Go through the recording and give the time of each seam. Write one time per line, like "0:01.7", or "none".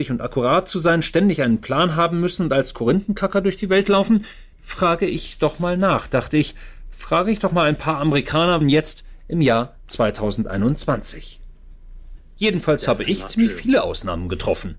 0:04.5
0:08.6
0:12.4